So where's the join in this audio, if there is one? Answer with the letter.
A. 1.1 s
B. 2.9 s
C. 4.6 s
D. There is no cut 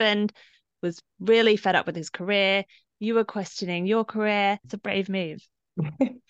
C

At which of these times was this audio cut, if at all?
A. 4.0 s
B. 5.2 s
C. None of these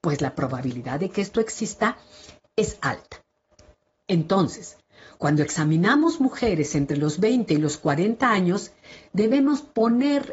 A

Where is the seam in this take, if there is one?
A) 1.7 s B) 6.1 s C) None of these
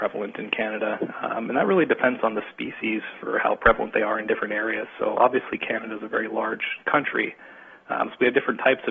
C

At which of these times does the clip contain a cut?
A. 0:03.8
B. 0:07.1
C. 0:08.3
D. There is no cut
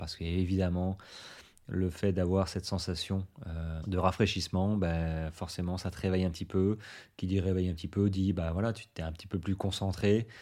A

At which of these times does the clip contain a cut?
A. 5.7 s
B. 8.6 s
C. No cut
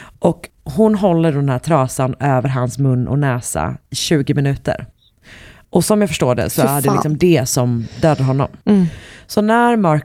B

